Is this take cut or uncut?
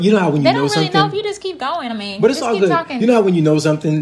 uncut